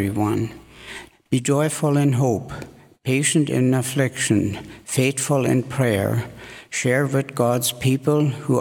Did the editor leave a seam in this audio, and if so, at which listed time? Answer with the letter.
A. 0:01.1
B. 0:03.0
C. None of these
A